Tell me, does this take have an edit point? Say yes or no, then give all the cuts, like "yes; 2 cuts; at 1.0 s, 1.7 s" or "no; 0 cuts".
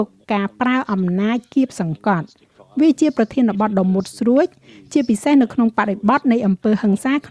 no; 0 cuts